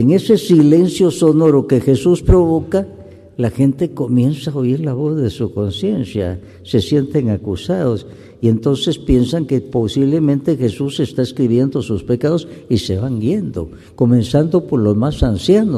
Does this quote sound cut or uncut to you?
uncut